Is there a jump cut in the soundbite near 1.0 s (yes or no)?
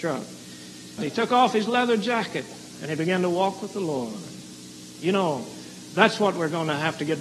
yes